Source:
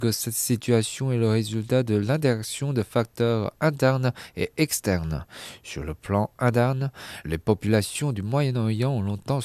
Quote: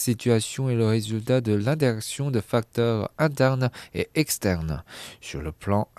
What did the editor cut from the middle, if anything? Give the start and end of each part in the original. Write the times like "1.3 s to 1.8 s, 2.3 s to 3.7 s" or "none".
none

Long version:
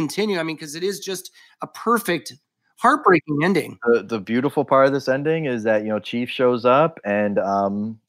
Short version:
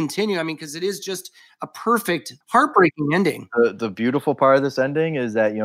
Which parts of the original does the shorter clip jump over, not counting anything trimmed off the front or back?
2.4 s to 2.7 s

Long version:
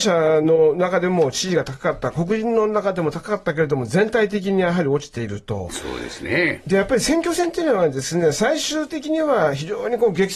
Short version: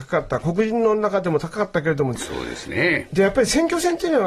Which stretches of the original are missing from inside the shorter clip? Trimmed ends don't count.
3.9 s to 5.7 s

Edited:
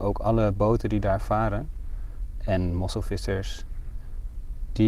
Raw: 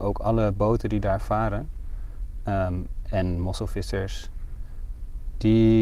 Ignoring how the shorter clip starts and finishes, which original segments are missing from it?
2.4 s to 3.1 s

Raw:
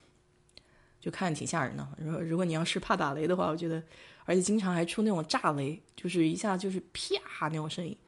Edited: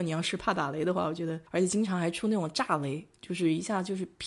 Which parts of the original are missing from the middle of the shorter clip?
3.9 s to 4.2 s

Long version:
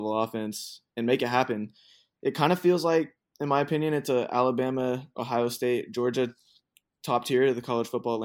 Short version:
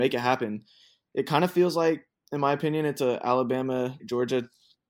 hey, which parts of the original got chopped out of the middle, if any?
5.1 s to 5.9 s

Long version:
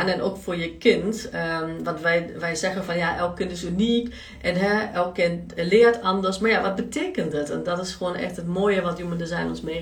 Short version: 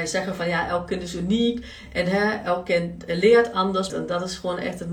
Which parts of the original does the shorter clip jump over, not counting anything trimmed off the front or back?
6.4 s to 7.5 s

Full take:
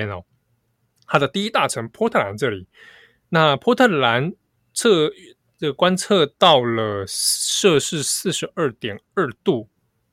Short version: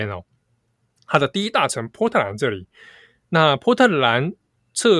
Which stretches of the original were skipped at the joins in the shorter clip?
none

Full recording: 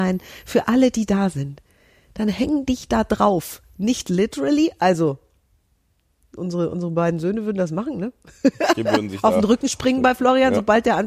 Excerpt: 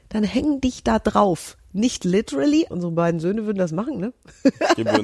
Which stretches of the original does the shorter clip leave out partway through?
4.8 s to 6.7 s

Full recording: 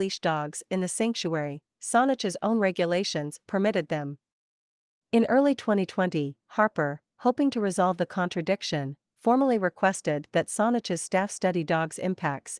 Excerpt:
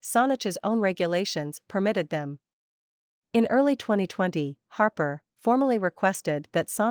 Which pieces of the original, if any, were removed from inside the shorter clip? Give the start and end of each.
7.1 s to 9.1 s

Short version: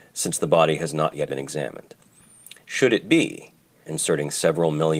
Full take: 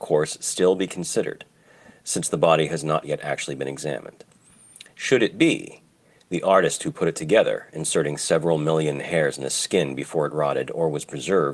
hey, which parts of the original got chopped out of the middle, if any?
3.2 s to 3.6 s, 6.1 s to 7.7 s

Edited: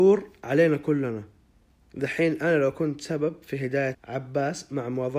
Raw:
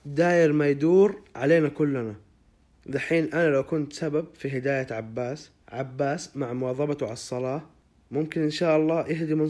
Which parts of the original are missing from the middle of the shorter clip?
4.9 s to 5.6 s

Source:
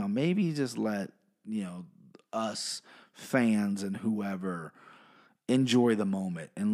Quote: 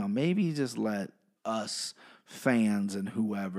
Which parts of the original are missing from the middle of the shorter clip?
1.4 s to 2.2 s

